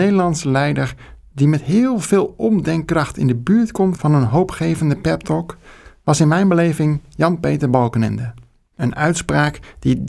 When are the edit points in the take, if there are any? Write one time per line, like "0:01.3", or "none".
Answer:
0:08.7